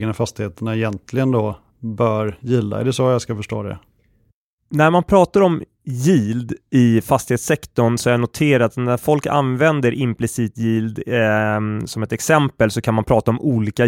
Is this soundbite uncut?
yes; 0 cuts

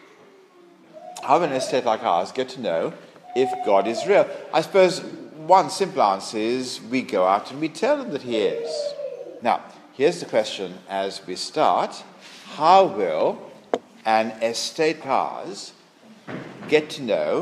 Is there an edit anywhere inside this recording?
yes; 2 cuts; at 9.4 s, 15.0 s

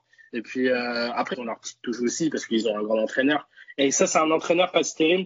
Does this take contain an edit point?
yes; 1 cut; at 1.3 s

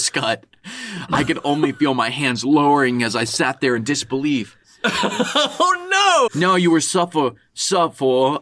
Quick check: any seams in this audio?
yes; 2 cuts; at 4.6 s, 6.3 s

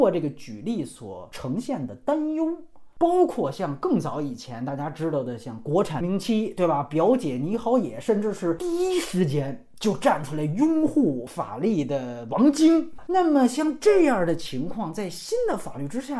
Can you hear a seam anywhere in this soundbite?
yes; 2 cuts; at 6.0 s, 13.0 s

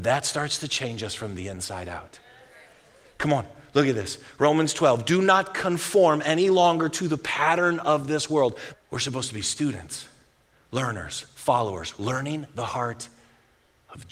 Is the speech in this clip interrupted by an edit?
yes; 1 cut; at 8.7 s

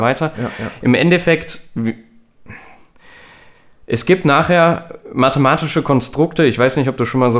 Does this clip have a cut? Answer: no; 0 cuts

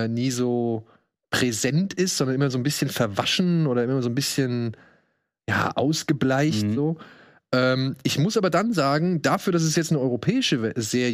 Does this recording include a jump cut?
no; 0 cuts

